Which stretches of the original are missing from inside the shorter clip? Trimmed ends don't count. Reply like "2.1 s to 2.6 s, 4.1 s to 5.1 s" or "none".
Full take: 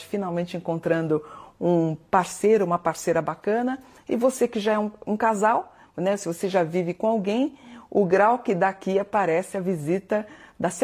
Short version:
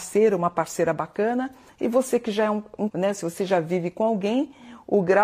5.2 s to 5.9 s